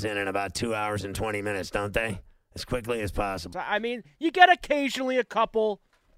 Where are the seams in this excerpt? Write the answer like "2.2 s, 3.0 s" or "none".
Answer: 3.5 s